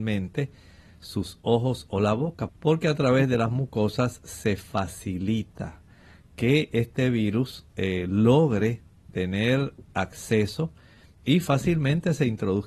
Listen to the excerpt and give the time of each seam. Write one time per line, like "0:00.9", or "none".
0:02.5